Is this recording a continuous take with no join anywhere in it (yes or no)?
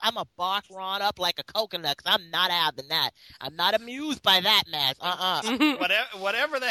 no